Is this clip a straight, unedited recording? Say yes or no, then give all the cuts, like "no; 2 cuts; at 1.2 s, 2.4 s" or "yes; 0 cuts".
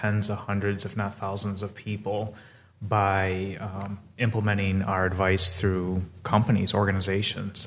yes; 0 cuts